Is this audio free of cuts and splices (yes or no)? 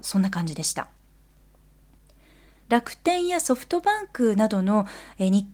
yes